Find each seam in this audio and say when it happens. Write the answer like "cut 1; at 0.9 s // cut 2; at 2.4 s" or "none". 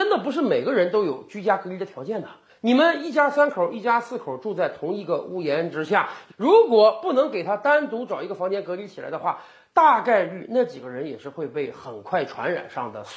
cut 1; at 6.3 s